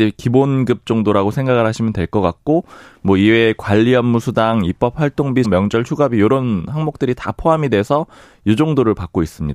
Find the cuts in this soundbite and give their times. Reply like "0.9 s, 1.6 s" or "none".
5.4 s